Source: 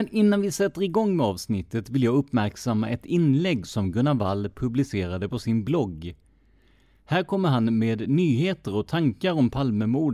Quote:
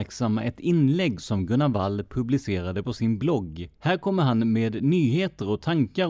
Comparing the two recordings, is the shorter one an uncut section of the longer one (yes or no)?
no